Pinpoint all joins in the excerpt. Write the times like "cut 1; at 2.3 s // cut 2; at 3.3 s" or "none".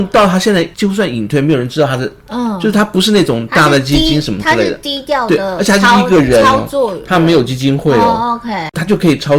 none